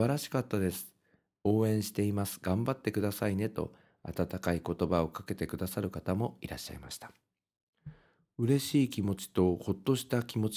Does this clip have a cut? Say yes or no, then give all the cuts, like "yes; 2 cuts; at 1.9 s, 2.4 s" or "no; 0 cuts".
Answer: no; 0 cuts